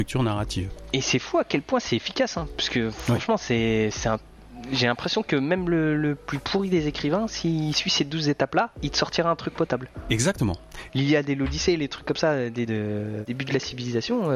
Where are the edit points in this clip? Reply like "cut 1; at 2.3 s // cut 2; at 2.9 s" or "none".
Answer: cut 1; at 10.9 s // cut 2; at 12.7 s